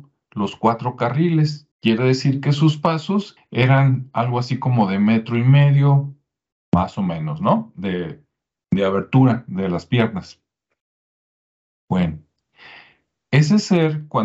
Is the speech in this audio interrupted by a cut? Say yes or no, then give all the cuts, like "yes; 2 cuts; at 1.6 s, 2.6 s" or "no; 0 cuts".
yes; 2 cuts; at 1.7 s, 3.4 s